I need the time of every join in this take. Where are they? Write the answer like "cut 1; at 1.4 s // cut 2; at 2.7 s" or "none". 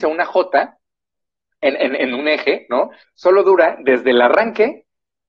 cut 1; at 3.0 s